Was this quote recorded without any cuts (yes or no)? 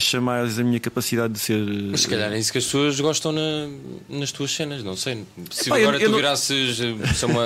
yes